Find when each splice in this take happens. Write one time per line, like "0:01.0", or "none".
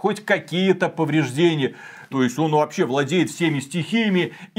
0:02.1